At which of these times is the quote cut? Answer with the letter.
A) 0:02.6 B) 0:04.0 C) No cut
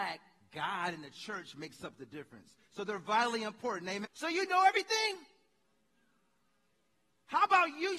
B